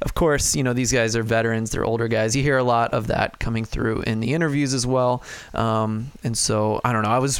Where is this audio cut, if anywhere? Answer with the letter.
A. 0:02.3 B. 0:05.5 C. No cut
C